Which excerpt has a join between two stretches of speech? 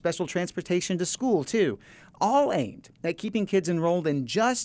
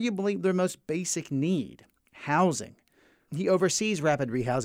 second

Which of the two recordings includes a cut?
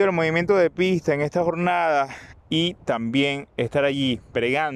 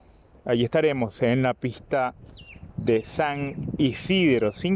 first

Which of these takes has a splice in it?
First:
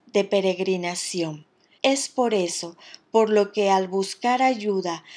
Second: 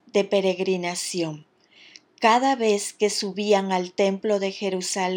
first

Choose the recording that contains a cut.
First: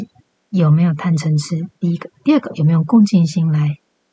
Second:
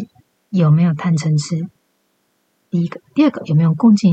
first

